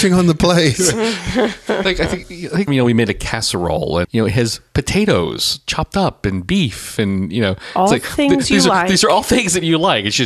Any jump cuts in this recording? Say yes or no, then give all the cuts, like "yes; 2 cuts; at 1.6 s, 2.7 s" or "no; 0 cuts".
yes; 2 cuts; at 2.7 s, 4.0 s